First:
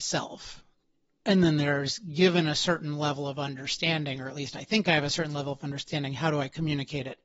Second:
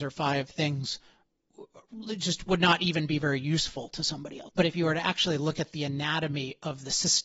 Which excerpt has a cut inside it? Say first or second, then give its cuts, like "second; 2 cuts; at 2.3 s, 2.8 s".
second; 1 cut; at 4.5 s